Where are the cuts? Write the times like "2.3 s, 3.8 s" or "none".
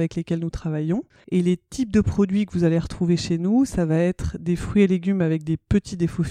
1.2 s